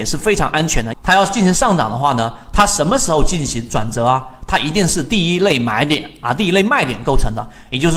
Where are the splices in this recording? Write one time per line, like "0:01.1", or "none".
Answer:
0:00.9